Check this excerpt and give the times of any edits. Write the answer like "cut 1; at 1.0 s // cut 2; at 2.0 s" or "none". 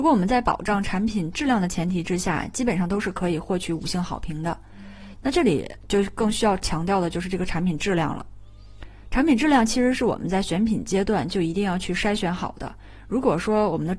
cut 1; at 5.1 s